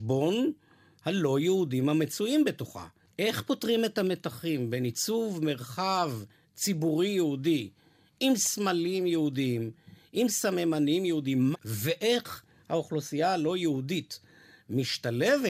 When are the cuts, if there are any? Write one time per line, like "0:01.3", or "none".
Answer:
0:11.5

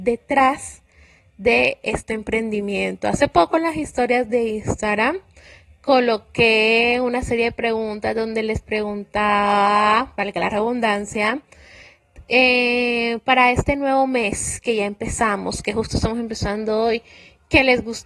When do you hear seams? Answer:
none

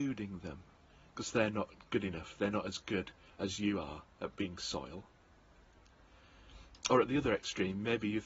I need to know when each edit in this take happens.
none

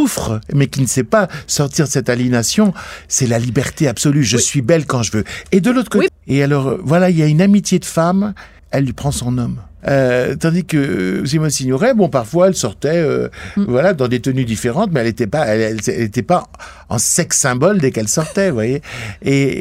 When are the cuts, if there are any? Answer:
0:06.1
0:08.6
0:09.8

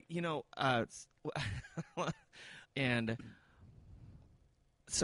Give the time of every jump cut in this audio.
0:02.6

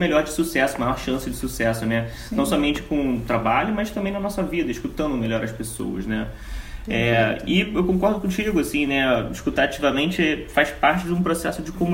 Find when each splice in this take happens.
none

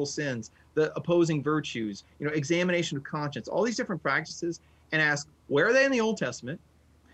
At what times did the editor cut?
none

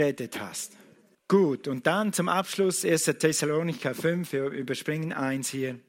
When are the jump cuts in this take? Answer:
0:01.1

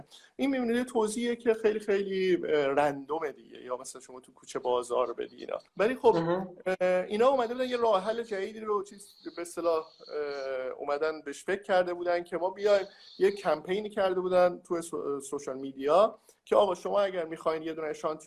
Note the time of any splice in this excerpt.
0:05.7

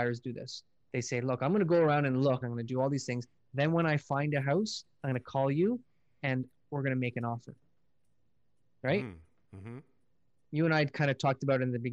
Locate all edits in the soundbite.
0:02.4

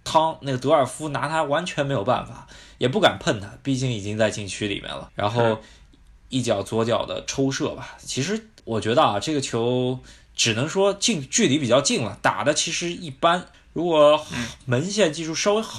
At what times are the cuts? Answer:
0:13.5

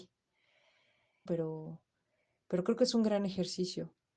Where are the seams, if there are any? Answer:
0:01.3

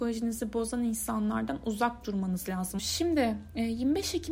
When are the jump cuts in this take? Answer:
0:02.8

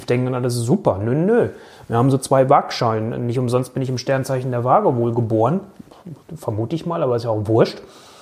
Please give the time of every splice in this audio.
none

